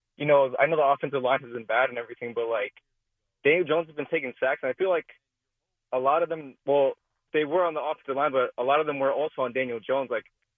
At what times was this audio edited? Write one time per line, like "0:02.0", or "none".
none